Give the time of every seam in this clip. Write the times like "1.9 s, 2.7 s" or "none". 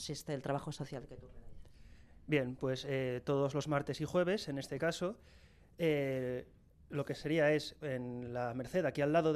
none